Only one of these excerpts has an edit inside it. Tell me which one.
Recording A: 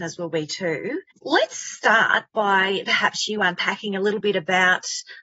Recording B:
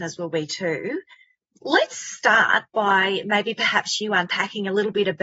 A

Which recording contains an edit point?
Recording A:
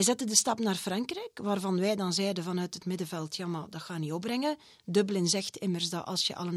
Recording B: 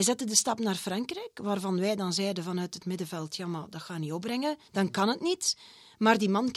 B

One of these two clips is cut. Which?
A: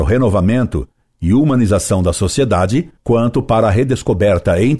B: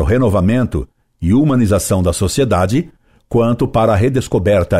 A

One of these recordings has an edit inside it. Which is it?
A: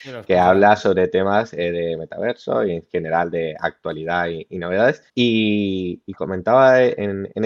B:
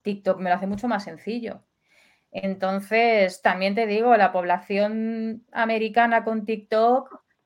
A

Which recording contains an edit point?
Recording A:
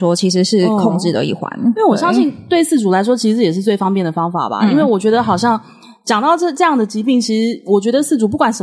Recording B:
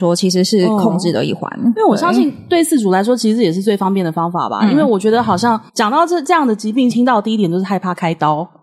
B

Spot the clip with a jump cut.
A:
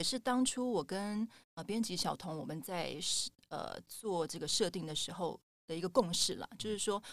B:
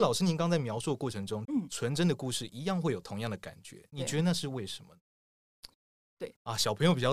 B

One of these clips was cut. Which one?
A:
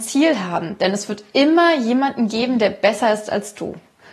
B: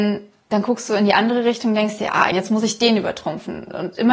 B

